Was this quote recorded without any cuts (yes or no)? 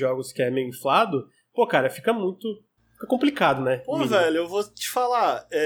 yes